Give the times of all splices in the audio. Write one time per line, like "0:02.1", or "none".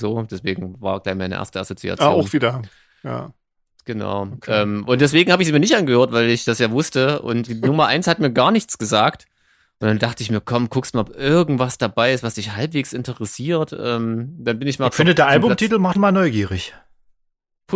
0:07.5
0:15.9

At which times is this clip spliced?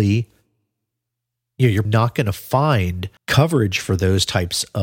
0:01.8
0:03.2

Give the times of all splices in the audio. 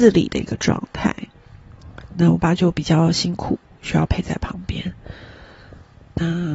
0:02.4

